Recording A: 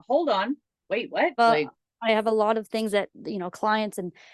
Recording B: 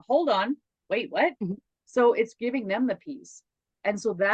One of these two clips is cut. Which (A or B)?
A